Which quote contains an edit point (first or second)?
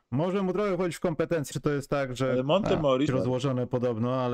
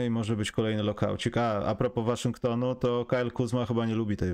first